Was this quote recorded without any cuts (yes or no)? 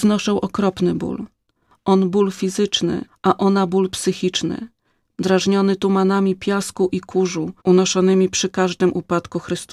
no